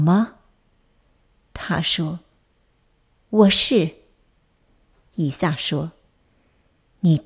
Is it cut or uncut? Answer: uncut